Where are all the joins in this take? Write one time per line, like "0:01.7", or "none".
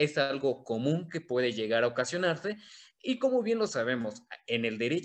none